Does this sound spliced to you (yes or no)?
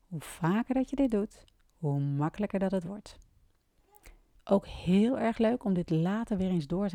yes